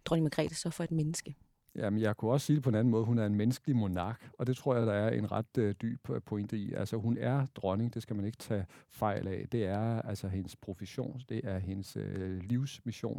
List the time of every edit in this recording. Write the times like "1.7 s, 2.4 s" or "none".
none